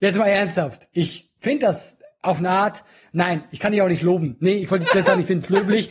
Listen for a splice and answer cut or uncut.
uncut